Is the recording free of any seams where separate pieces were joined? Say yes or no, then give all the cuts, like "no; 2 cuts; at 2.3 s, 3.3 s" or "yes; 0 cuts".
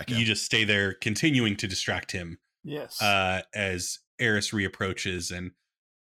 no; 1 cut; at 4.1 s